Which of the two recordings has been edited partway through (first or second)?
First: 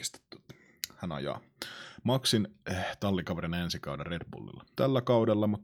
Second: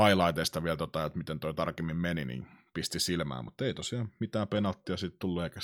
first